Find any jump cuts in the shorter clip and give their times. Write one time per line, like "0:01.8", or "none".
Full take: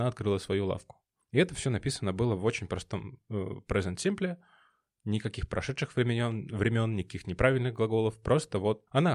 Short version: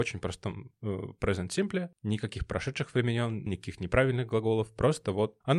0:01.9
0:03.5